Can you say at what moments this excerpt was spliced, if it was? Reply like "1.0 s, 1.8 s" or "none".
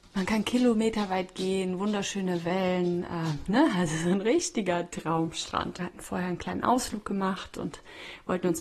5.8 s